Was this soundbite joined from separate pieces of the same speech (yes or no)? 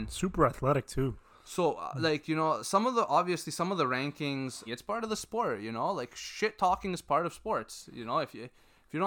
yes